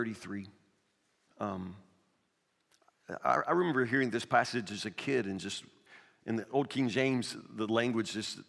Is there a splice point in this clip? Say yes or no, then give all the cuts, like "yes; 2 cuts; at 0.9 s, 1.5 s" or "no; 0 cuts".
yes; 1 cut; at 1.3 s